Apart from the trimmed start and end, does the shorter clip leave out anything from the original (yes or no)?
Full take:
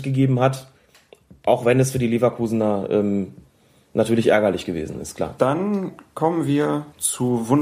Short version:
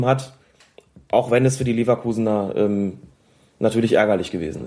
no